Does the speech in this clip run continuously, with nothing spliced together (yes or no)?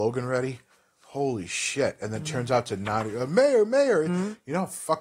no